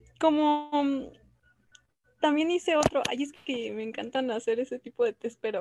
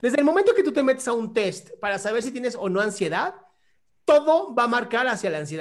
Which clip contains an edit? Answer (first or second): first